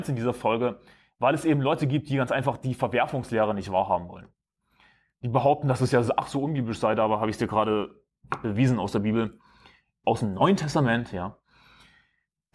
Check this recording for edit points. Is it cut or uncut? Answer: uncut